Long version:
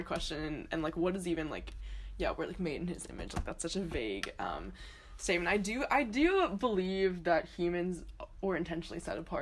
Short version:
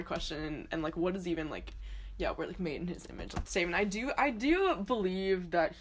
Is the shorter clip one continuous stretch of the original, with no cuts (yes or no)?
no